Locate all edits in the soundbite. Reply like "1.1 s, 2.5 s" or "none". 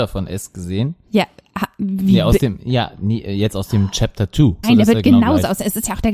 4.6 s